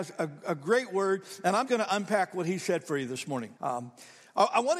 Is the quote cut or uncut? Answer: cut